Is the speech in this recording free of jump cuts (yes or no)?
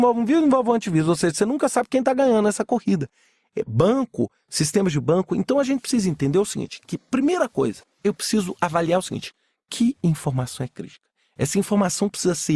no